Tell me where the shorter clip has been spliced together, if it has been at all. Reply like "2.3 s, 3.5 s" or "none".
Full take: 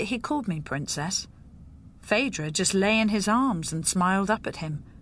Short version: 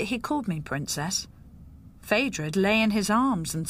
2.5 s